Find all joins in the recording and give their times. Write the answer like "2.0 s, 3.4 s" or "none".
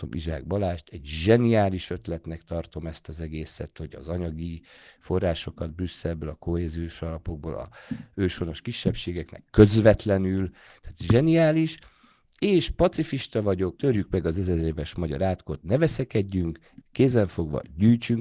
13.8 s, 16.8 s